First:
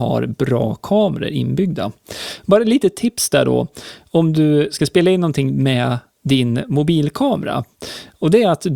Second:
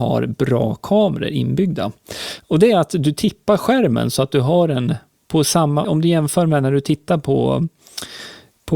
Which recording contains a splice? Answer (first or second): second